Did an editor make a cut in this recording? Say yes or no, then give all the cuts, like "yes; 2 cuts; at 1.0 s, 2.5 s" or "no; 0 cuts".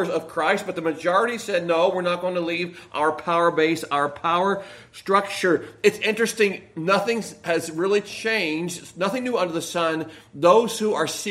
no; 0 cuts